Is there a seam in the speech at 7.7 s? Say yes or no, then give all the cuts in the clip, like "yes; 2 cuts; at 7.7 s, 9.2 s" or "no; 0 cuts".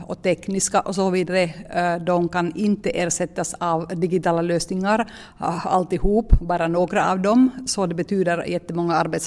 no; 0 cuts